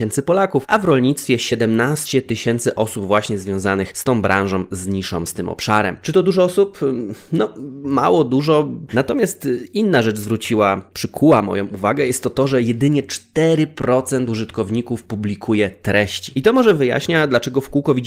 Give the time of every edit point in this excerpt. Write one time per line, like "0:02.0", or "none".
0:08.9